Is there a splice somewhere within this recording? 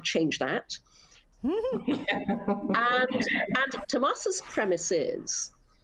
yes; 2 cuts; at 1.3 s, 3.8 s

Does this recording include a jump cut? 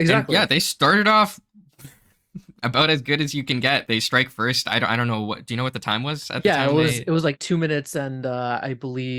no; 0 cuts

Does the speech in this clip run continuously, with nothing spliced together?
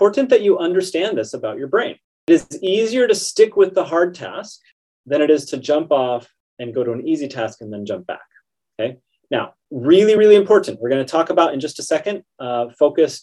yes; 0 cuts

